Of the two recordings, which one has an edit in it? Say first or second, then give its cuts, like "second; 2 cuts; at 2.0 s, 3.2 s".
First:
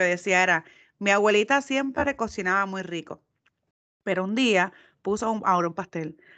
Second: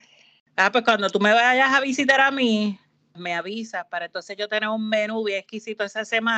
second; 1 cut; at 3.1 s